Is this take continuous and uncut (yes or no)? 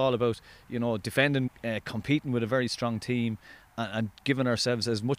no